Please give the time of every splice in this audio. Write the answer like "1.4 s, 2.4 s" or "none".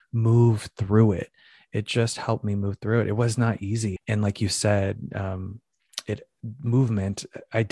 4.0 s